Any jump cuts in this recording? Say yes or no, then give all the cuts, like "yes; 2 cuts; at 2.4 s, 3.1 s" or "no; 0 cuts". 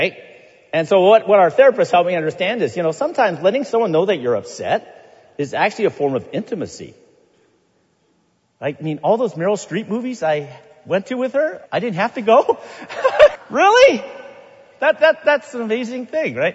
yes; 2 cuts; at 11.7 s, 13.4 s